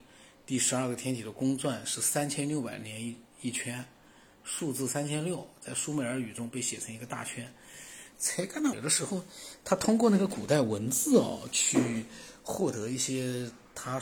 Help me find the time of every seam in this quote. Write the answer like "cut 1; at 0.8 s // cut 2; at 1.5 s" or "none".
cut 1; at 8.7 s